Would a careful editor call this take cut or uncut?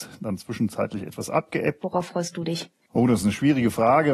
cut